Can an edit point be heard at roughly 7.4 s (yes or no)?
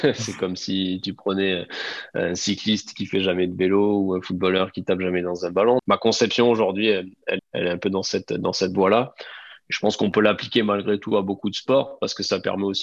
yes